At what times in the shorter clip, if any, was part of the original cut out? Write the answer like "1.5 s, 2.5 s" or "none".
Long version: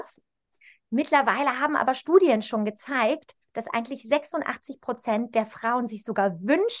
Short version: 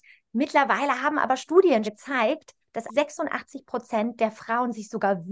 1.8 s, 2.9 s